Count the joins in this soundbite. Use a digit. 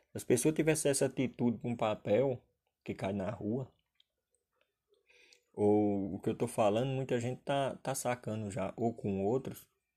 0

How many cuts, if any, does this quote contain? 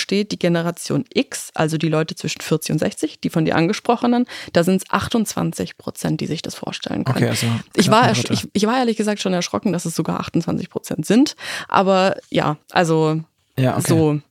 1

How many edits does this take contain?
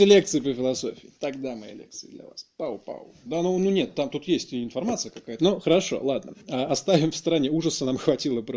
2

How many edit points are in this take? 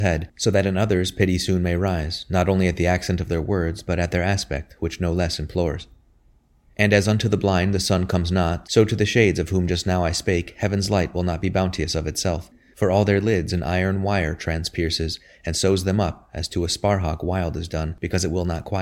0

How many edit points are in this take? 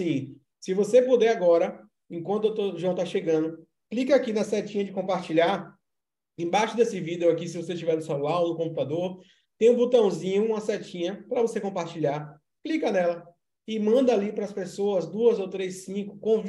0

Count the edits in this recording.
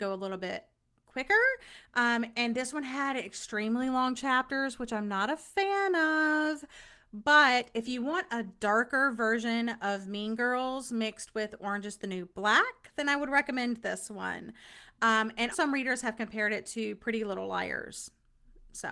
1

